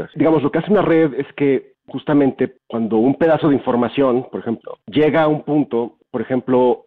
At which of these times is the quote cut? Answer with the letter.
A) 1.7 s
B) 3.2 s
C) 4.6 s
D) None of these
C